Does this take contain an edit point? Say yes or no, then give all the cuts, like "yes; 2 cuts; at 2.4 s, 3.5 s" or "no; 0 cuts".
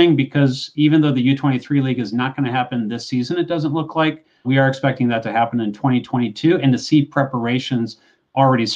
yes; 1 cut; at 4.4 s